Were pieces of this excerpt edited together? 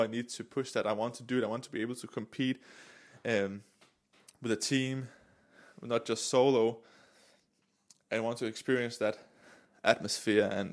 no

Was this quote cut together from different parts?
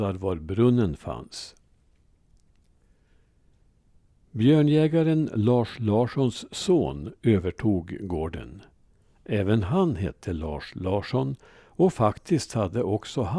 no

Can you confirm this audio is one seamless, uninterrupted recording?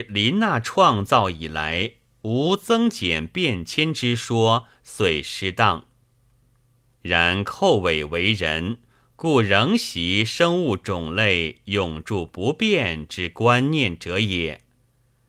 yes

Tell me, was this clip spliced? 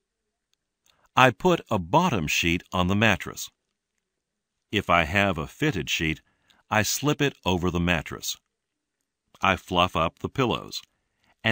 yes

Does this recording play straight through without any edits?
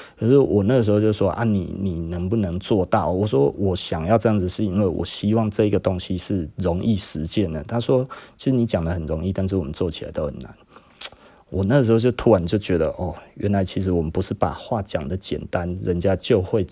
yes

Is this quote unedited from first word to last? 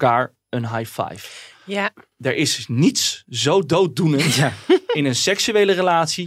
yes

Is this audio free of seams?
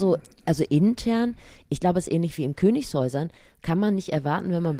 yes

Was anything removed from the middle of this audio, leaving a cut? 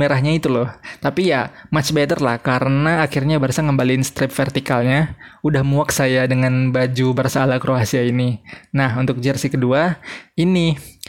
no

